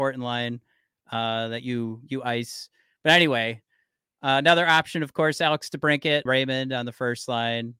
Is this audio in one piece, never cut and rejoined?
no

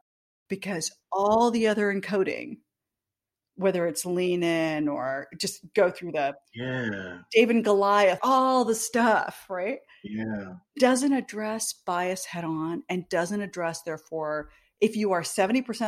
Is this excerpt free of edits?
no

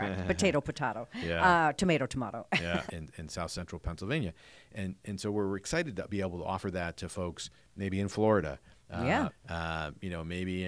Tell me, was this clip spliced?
yes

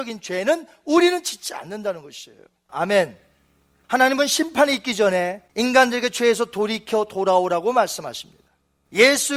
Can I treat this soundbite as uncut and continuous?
no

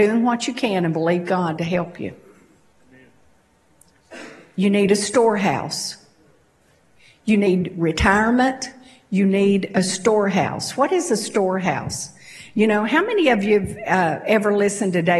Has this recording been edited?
no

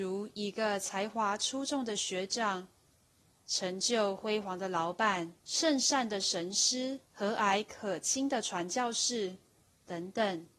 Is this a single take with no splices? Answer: no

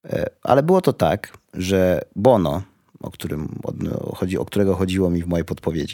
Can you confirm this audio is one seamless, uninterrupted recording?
yes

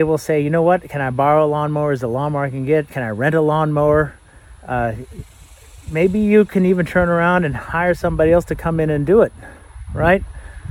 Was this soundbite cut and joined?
no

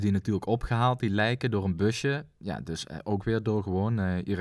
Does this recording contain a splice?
no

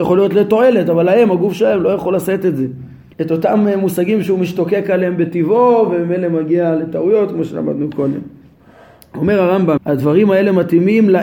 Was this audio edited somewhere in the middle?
yes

